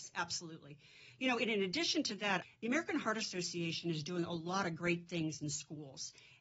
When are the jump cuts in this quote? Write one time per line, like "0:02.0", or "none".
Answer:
0:02.4

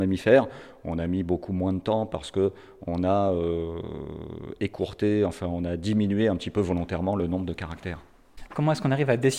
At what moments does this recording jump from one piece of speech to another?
0:08.5

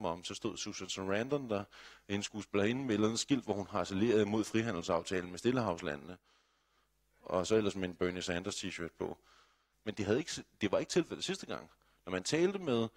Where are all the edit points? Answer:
0:09.7

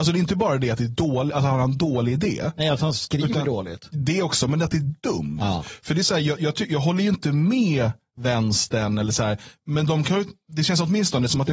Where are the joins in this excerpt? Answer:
none

